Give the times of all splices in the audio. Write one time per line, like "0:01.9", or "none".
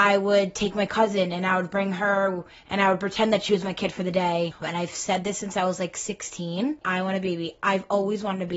0:04.6
0:06.8